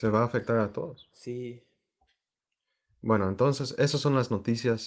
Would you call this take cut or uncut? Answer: uncut